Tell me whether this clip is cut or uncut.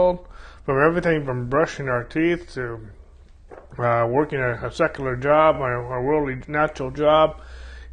uncut